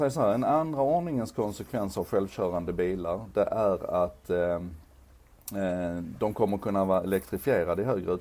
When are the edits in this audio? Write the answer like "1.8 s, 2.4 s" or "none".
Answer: none